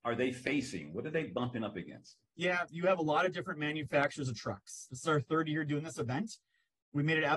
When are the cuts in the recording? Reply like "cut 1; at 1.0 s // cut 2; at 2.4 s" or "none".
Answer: cut 1; at 2.7 s // cut 2; at 4.9 s

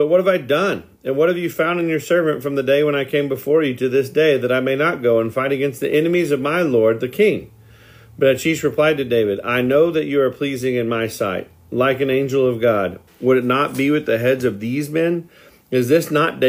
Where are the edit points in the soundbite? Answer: cut 1; at 13.1 s

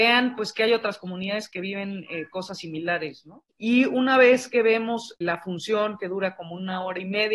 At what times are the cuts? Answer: cut 1; at 3.5 s

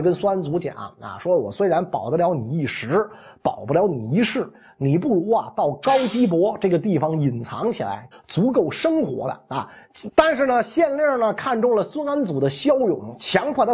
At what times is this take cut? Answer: cut 1; at 8.1 s // cut 2; at 10.1 s

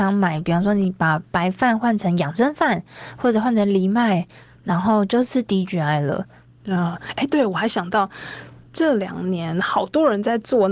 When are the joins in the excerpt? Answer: none

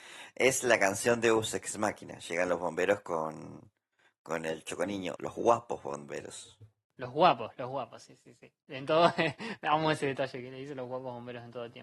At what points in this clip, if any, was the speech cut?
cut 1; at 5.2 s

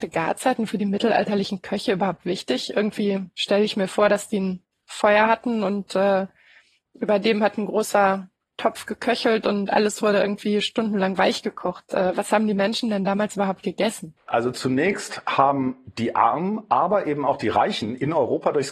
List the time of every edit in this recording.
none

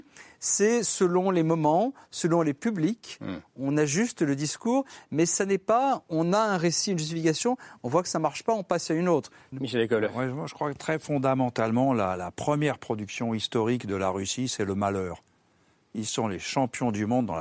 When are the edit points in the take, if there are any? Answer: cut 1; at 9.5 s

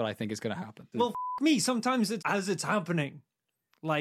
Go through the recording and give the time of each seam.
cut 1; at 0.9 s // cut 2; at 2.2 s

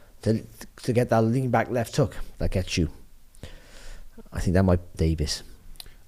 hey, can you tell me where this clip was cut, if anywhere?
cut 1; at 4.9 s

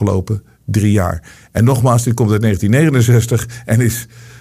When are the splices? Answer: none

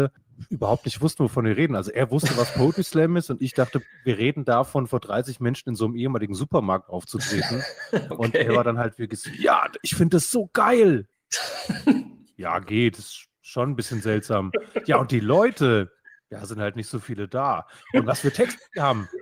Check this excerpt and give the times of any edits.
cut 1; at 17.8 s

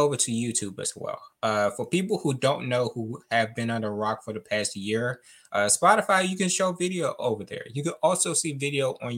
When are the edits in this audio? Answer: none

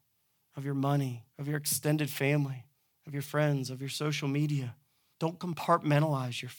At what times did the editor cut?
cut 1; at 1.3 s // cut 2; at 5.1 s

